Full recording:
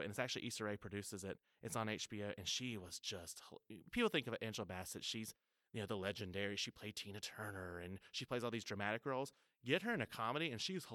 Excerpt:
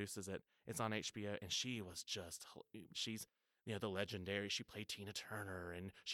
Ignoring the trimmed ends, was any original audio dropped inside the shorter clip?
yes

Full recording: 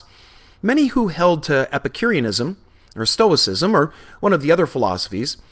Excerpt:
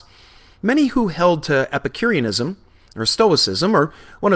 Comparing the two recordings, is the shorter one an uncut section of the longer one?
yes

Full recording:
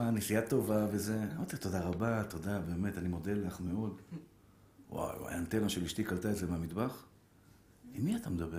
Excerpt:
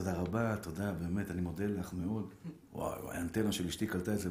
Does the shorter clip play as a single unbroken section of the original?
no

